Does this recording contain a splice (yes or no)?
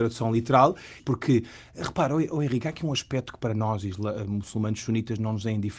yes